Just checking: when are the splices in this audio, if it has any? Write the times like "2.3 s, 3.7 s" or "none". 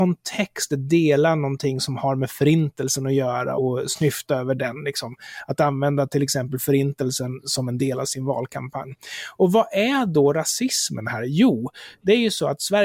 3.6 s